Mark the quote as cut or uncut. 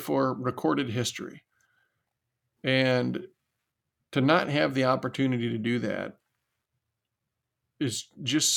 cut